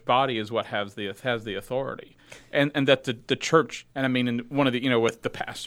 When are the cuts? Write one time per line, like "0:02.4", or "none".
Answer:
0:03.9